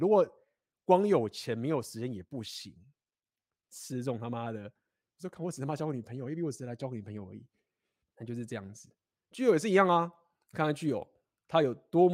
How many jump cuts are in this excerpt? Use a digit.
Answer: 2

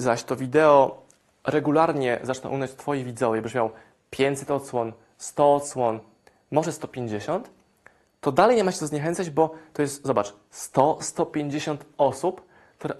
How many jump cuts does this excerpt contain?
0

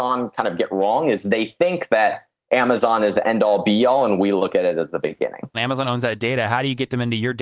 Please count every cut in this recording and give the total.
1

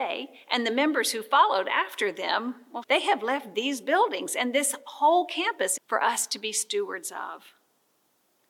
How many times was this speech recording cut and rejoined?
2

